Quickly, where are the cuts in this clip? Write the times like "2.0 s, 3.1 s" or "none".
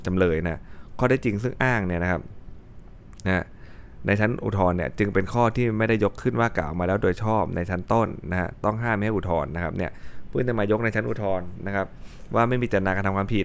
none